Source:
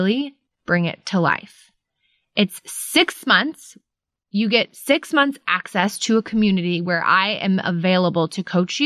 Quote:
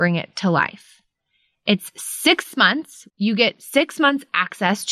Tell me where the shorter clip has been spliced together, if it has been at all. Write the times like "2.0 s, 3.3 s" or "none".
3.1 s